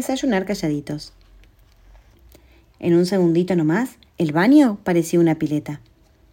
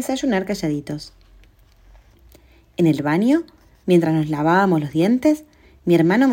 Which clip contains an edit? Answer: first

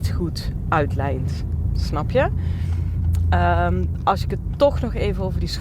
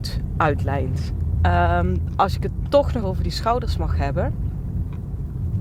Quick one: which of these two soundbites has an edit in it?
second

